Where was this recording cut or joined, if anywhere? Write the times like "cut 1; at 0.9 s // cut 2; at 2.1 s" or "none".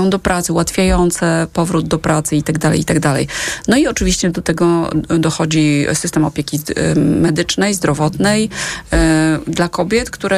none